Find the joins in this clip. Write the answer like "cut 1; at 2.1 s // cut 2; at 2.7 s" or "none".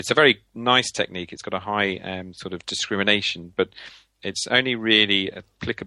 cut 1; at 4.2 s